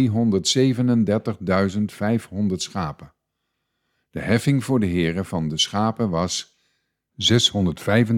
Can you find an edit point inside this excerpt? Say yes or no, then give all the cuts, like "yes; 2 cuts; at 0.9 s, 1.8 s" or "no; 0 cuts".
no; 0 cuts